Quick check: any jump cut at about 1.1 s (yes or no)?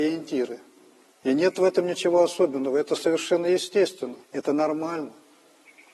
yes